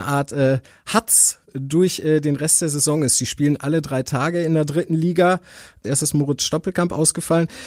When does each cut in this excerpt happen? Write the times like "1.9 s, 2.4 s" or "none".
5.8 s